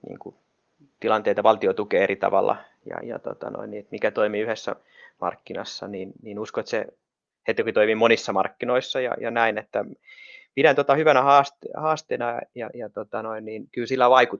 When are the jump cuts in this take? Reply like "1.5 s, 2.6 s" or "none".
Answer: 3.0 s